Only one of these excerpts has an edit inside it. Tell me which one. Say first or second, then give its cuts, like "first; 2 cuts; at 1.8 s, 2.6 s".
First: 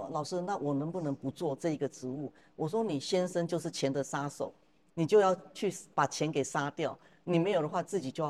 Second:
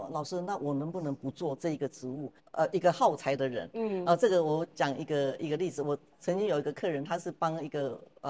second; 1 cut; at 2.4 s